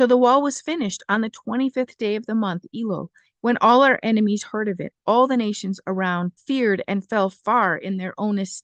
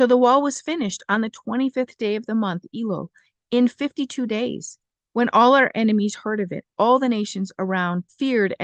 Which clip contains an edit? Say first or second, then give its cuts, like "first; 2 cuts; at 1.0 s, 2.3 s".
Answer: first; 1 cut; at 3.3 s